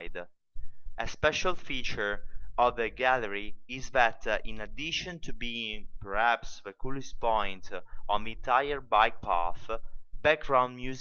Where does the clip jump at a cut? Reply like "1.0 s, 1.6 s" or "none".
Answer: 0.9 s

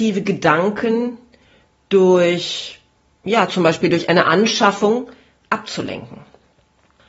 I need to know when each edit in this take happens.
none

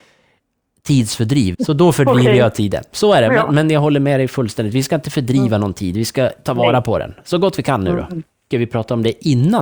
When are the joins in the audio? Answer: 1.5 s, 8.5 s

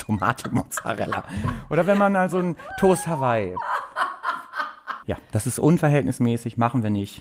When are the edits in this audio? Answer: 5.0 s

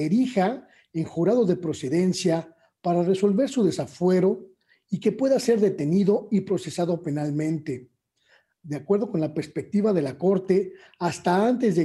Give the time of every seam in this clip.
none

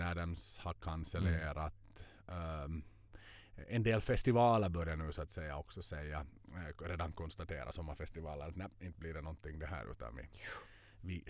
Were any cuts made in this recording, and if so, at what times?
none

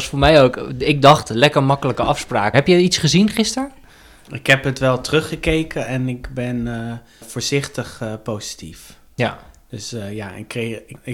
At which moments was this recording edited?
2.5 s

